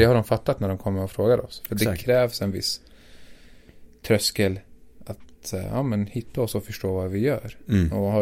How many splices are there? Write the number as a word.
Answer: zero